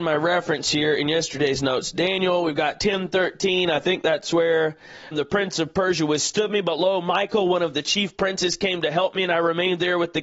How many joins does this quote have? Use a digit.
1